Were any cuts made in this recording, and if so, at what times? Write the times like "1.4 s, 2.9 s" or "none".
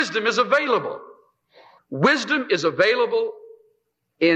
1.8 s